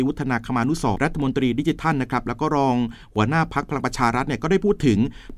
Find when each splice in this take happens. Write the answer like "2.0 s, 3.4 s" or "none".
1.0 s